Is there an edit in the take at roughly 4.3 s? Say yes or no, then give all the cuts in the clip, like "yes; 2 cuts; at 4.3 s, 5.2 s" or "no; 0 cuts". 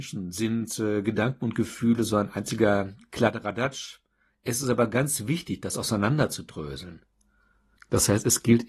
no; 1 cut; at 7.8 s